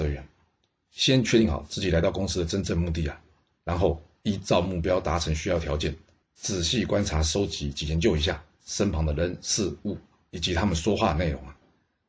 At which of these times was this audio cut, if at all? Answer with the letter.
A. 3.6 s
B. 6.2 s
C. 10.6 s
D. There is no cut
D